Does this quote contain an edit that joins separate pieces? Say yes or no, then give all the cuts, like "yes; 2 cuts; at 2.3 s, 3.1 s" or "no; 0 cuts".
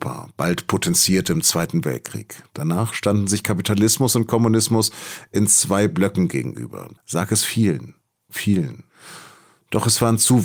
yes; 1 cut; at 7.0 s